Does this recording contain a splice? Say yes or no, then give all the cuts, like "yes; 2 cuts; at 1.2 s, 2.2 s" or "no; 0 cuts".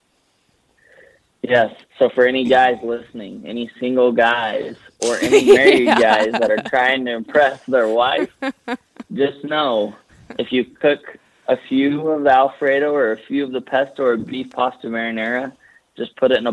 no; 0 cuts